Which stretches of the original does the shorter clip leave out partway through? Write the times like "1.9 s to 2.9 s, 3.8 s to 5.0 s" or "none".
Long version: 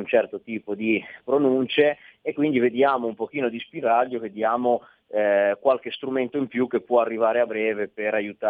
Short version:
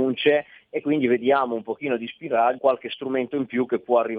4.1 s to 5.6 s